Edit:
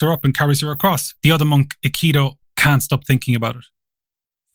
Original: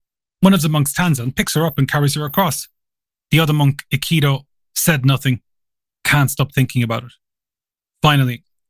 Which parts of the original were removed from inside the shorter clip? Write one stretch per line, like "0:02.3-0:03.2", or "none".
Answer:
0:02.7-0:03.2
0:04.5-0:05.9